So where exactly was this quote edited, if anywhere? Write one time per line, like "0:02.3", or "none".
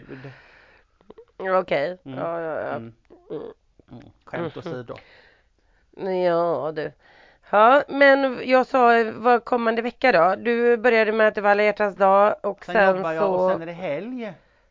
0:07.9